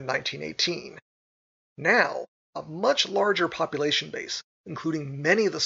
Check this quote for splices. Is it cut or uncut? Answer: cut